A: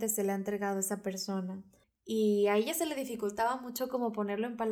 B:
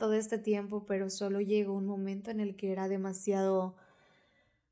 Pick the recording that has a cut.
A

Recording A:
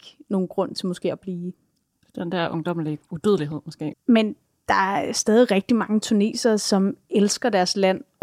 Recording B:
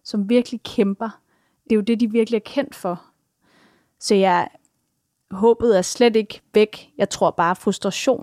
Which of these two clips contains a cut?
A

